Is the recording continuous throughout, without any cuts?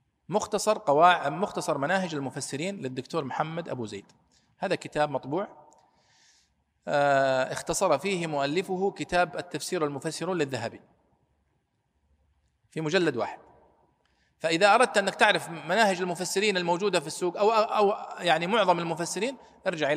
yes; 0 cuts

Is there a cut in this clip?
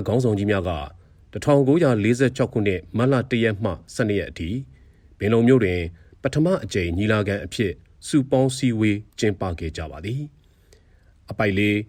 no; 0 cuts

